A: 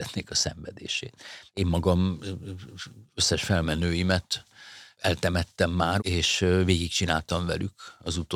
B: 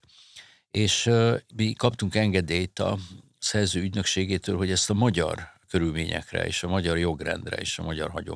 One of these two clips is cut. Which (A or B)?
A